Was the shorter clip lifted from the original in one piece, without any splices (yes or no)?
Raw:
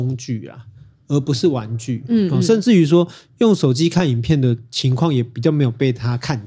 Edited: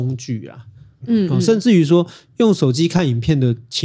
no